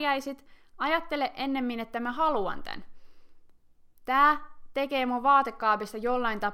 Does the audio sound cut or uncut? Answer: uncut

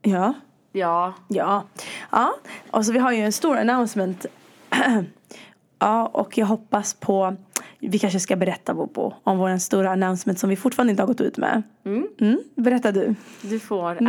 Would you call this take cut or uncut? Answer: uncut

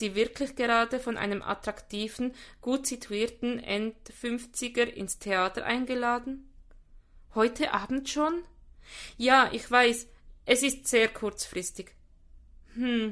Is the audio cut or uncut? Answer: uncut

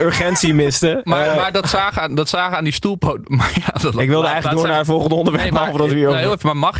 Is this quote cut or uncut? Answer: uncut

